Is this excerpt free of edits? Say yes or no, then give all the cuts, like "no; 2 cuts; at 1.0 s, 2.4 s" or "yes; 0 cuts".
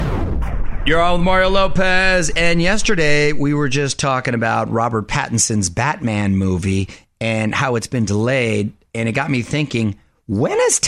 yes; 0 cuts